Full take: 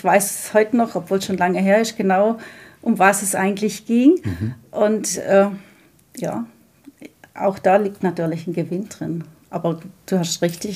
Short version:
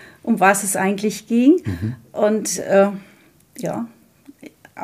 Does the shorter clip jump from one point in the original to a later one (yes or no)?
no